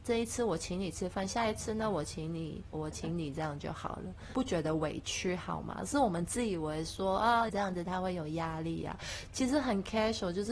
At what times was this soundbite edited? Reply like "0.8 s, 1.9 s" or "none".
2.7 s, 4.3 s, 7.5 s